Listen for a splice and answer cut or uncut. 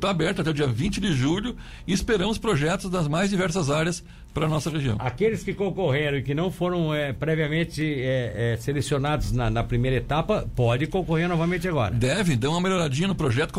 uncut